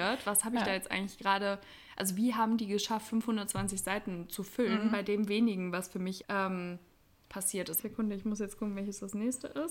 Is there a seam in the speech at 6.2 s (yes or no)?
yes